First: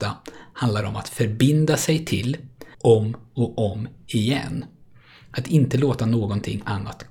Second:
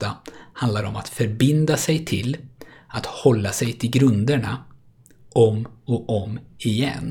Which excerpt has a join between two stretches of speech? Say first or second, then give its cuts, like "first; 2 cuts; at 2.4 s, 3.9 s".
first; 1 cut; at 2.7 s